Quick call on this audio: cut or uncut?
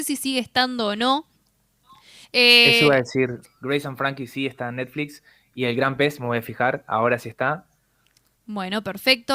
cut